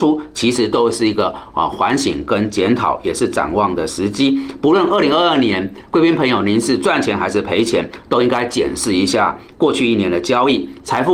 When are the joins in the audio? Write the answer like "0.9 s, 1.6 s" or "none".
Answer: none